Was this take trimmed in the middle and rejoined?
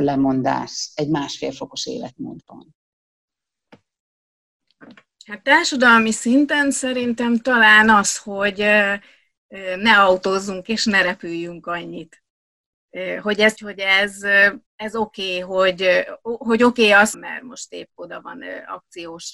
yes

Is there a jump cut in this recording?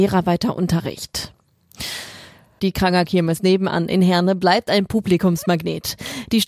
yes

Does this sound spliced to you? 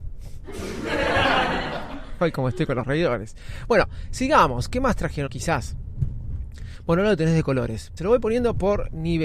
yes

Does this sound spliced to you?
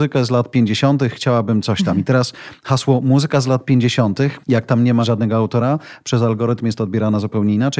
no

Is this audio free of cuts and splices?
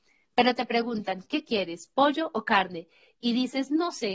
yes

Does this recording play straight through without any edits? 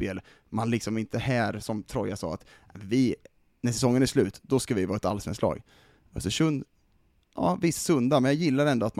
yes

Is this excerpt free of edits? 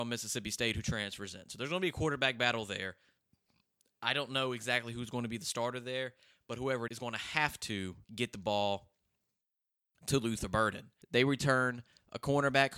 no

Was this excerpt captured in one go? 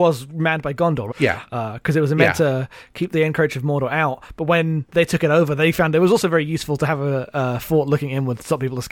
no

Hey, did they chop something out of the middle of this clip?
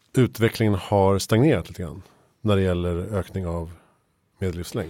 no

